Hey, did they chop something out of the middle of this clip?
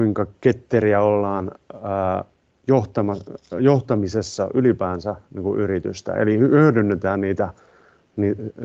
no; 0 cuts

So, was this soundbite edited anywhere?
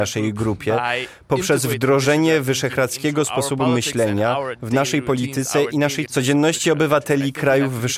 yes; 1 cut; at 6.1 s

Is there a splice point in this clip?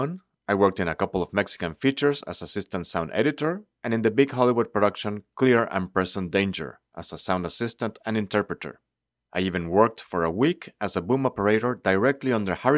no; 0 cuts

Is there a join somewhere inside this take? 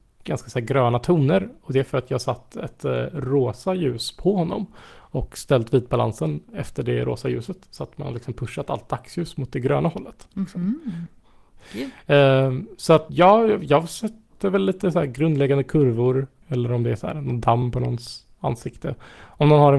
yes; 2 cuts; at 13.1 s, 16.4 s

